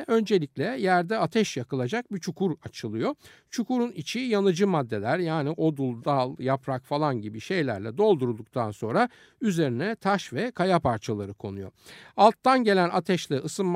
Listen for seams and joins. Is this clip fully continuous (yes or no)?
yes